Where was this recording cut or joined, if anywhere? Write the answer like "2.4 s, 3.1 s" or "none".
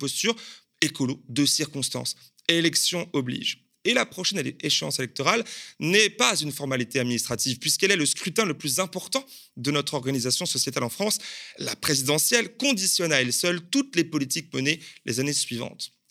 none